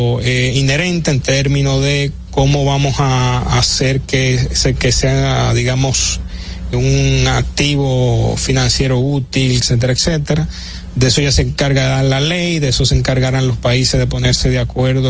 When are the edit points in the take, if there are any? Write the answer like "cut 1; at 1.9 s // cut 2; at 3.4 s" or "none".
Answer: cut 1; at 6.7 s // cut 2; at 9.6 s